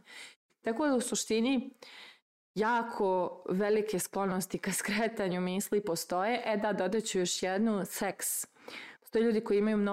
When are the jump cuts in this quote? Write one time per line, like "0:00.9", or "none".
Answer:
none